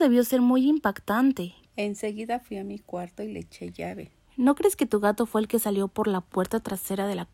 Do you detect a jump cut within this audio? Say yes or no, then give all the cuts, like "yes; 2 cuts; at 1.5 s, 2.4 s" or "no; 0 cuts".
yes; 2 cuts; at 1.7 s, 4.2 s